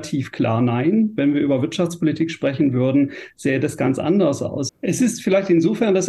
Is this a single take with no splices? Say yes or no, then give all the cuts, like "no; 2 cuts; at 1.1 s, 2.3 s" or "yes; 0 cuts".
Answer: no; 1 cut; at 4.7 s